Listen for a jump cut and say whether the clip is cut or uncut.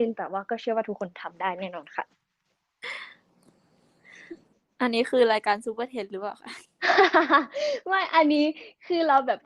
uncut